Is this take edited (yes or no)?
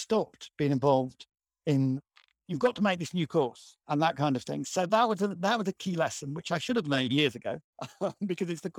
no